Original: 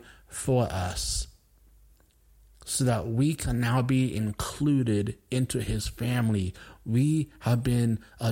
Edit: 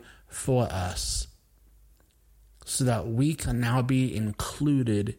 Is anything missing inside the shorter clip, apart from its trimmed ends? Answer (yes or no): no